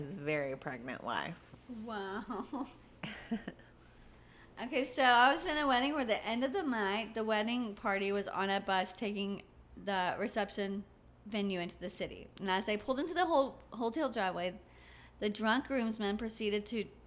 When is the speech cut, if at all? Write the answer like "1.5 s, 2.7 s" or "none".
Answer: none